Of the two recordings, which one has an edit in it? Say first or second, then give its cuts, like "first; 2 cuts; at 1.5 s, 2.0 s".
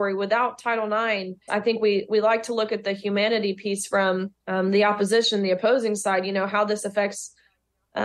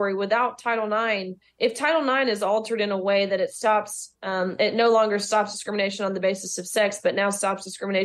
first; 2 cuts; at 1.5 s, 4.4 s